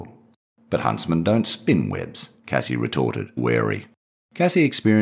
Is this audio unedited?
no; 1 cut; at 3.4 s

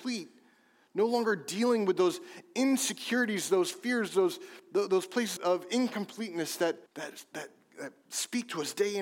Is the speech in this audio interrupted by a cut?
yes; 2 cuts; at 5.4 s, 6.9 s

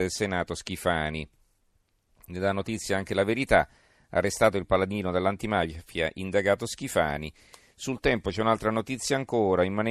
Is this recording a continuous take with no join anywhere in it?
yes; 0 cuts

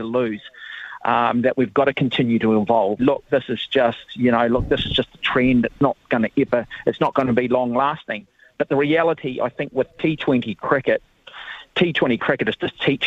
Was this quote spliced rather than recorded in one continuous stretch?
yes; 1 cut; at 3.0 s

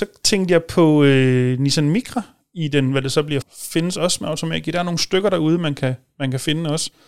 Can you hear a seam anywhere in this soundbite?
yes; 1 cut; at 3.4 s

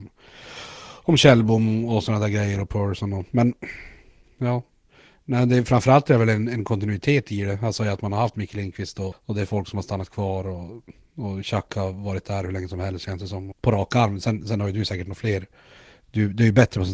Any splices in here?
yes; 2 cuts; at 9.1 s, 13.5 s

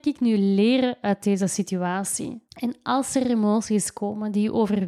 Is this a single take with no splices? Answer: no; 1 cut; at 2.5 s

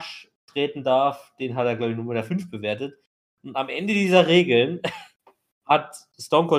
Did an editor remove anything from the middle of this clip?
no; 0 cuts

